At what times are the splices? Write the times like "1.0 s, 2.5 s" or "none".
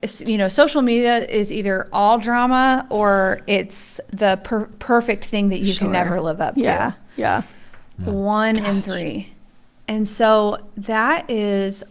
7.9 s